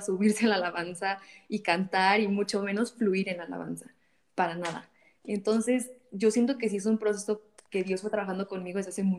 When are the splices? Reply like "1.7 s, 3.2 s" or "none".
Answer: none